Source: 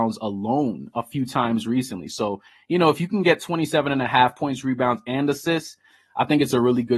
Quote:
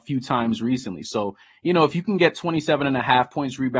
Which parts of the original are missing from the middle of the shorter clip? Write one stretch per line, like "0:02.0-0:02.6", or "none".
none